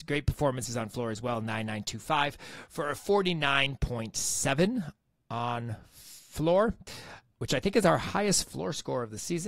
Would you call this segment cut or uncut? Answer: uncut